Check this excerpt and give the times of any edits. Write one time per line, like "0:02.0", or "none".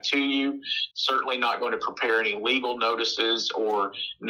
0:00.9